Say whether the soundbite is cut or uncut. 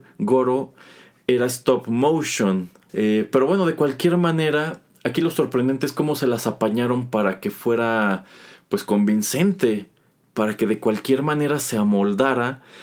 cut